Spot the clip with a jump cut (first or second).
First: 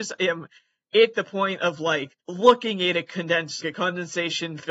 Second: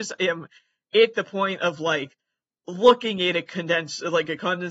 first